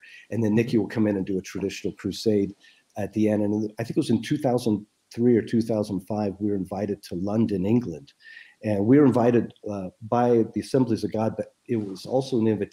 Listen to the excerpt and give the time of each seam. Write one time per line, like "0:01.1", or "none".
none